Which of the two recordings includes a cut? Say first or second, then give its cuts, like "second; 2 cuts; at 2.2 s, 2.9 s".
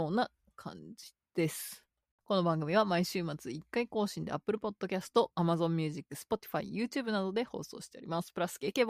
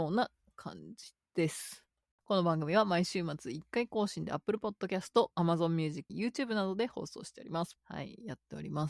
second; 2 cuts; at 6.1 s, 7.8 s